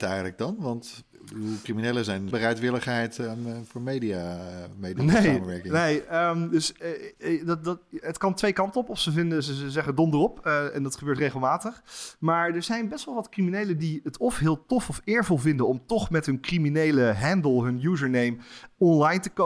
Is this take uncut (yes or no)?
no